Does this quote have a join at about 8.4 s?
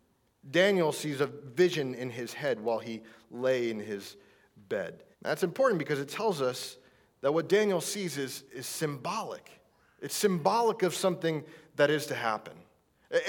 yes; 2 cuts; at 5.1 s, 8.4 s

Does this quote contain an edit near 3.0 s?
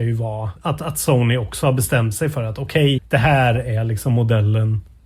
yes; 1 cut; at 3.0 s

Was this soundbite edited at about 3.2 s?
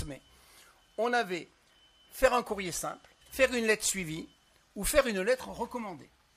yes; 1 cut; at 3.2 s

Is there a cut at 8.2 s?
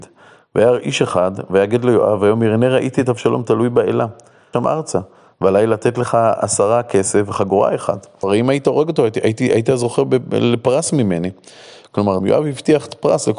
yes; 3 cuts; at 4.5 s, 8.2 s, 12.2 s

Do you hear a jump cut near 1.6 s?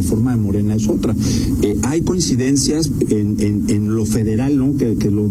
no; 0 cuts

